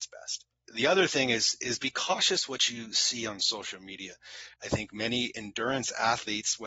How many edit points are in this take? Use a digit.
1